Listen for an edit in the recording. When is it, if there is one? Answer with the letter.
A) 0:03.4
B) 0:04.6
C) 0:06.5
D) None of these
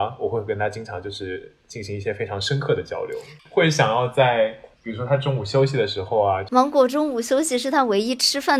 A